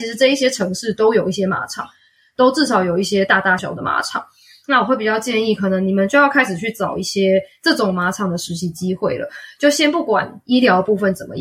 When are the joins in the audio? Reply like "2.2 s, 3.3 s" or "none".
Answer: 3.6 s